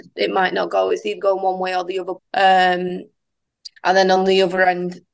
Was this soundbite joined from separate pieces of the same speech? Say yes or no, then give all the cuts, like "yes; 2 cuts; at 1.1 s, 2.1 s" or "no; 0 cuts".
yes; 2 cuts; at 2.2 s, 3.8 s